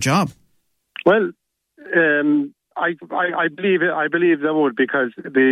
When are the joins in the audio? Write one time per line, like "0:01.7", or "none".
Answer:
none